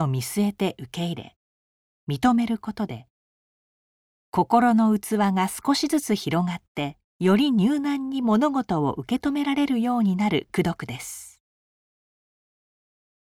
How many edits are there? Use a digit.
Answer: 1